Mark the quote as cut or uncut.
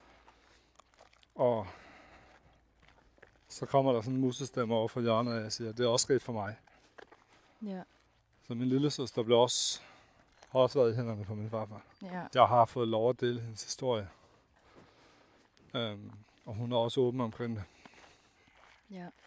cut